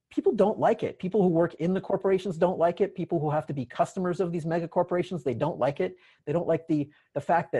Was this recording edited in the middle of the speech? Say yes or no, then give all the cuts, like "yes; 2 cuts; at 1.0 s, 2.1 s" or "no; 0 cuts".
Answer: no; 0 cuts